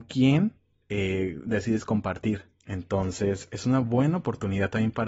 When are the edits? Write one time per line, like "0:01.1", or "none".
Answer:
none